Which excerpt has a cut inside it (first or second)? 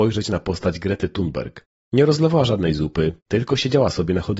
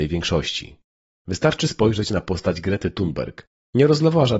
first